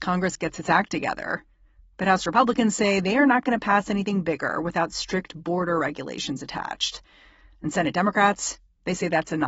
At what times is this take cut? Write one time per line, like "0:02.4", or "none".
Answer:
none